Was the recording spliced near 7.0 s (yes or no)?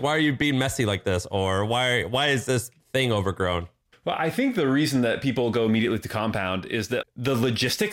yes